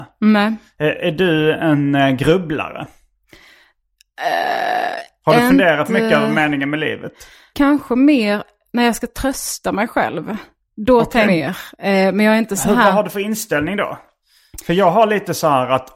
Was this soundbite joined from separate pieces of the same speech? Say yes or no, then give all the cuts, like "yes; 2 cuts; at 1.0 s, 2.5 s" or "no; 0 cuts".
yes; 2 cuts; at 7.5 s, 11.2 s